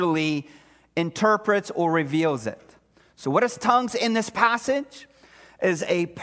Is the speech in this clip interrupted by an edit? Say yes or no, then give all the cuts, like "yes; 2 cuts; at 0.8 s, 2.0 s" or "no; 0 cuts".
no; 0 cuts